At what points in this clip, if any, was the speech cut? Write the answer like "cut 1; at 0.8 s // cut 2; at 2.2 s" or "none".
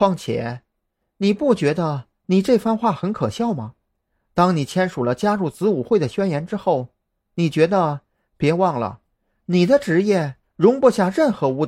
cut 1; at 8.3 s

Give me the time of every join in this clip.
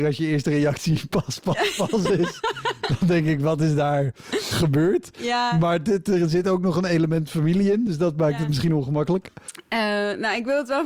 none

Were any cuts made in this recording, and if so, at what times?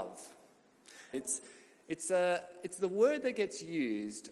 cut 1; at 1.1 s

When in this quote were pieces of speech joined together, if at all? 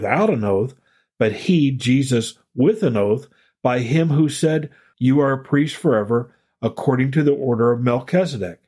cut 1; at 4.9 s

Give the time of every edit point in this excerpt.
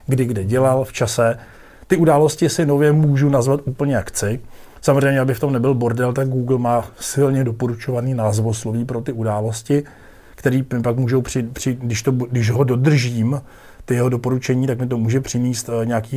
none

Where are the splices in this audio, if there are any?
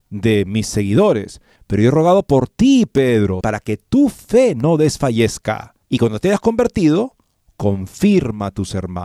cut 1; at 1.6 s // cut 2; at 3.4 s // cut 3; at 5.8 s

